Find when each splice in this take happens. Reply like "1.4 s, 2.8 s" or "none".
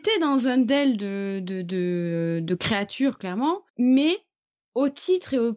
3.7 s